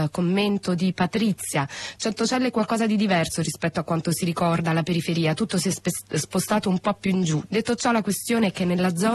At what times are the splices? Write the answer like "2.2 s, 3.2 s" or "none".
7.5 s

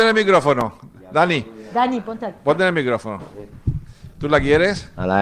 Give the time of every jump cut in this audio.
none

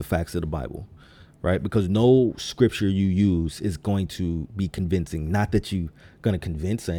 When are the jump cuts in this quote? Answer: none

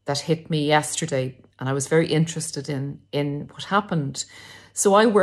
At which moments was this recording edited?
none

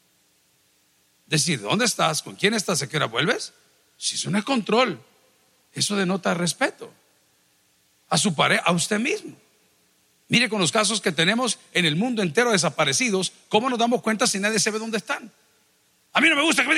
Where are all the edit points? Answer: none

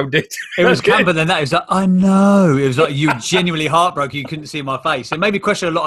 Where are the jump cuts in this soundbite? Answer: none

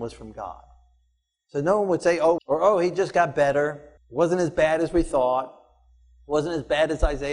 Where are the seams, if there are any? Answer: 2.4 s, 4.0 s

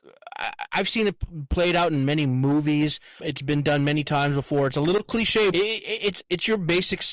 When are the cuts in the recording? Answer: 3.2 s, 5.5 s

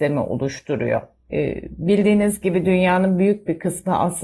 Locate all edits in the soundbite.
1.3 s

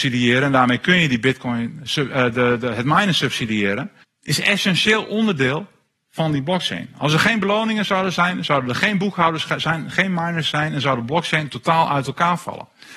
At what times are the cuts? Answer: 4.0 s

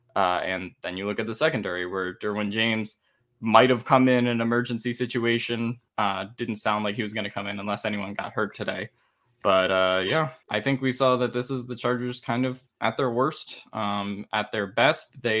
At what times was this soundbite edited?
10.4 s

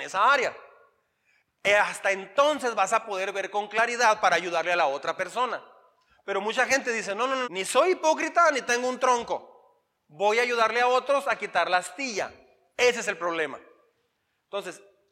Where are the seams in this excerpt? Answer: 7.4 s

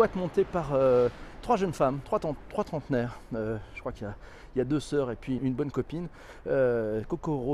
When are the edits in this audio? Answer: 5.4 s

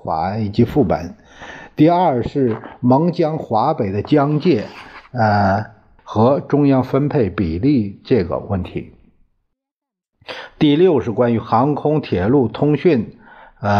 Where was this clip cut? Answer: 6.0 s

